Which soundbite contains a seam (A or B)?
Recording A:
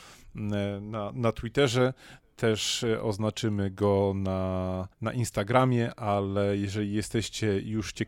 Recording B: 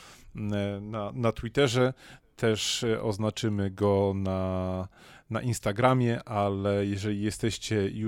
A